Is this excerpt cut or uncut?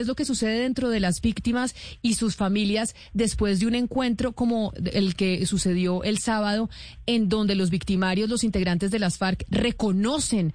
uncut